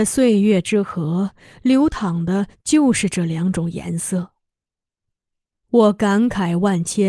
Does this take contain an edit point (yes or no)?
no